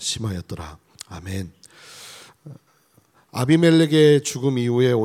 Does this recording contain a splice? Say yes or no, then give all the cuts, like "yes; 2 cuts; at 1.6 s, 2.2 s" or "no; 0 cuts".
no; 0 cuts